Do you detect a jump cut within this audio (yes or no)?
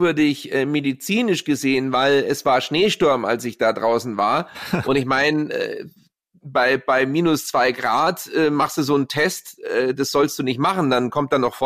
no